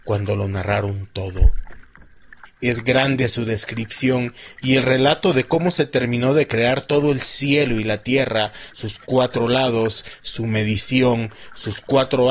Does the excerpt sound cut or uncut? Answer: cut